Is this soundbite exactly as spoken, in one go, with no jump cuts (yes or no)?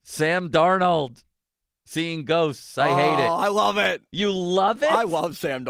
yes